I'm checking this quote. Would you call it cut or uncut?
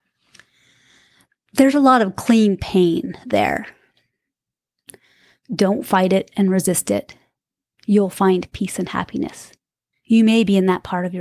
cut